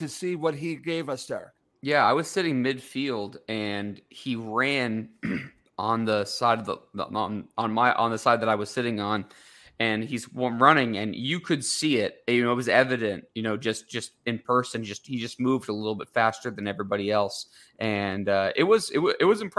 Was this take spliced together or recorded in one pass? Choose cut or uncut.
uncut